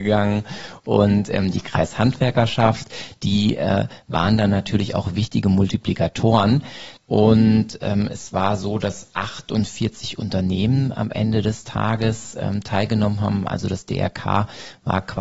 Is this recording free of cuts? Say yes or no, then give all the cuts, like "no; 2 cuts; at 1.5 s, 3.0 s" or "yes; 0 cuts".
no; 1 cut; at 7.0 s